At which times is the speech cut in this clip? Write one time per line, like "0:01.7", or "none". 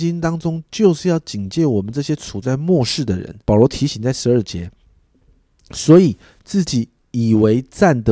0:03.4